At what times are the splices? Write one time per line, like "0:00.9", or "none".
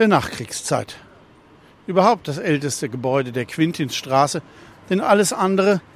none